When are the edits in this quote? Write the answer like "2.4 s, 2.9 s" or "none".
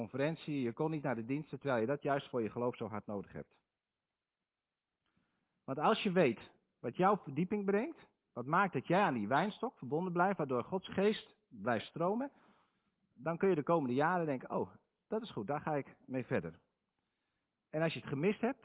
none